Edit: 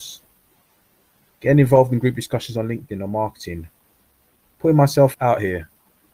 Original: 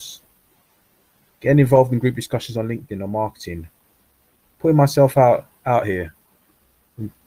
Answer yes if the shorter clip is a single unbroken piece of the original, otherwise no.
no